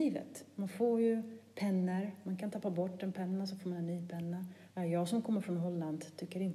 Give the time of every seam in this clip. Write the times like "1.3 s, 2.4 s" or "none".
4.7 s